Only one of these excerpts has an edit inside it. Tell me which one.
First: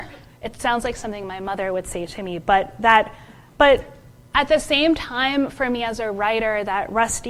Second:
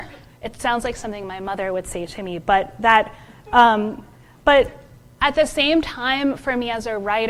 first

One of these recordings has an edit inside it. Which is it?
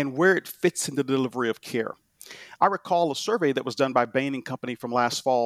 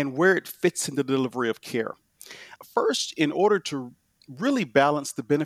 second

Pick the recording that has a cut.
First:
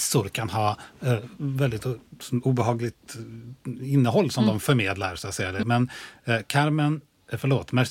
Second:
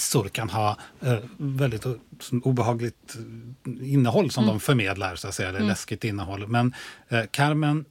first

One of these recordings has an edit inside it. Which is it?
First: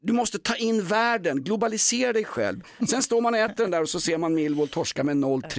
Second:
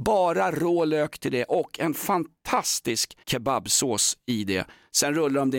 second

